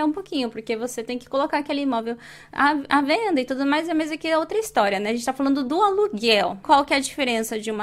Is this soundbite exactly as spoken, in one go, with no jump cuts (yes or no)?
no